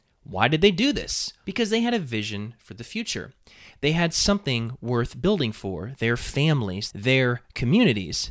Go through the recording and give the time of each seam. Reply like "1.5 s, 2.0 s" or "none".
1.4 s, 6.9 s